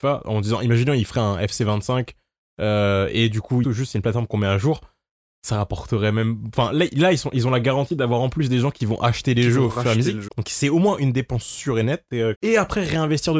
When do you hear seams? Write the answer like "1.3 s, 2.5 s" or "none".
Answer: 3.6 s, 10.3 s, 12.4 s